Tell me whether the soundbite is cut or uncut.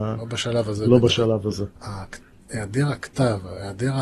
cut